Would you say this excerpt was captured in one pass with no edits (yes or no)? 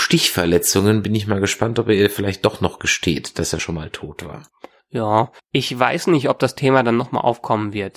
yes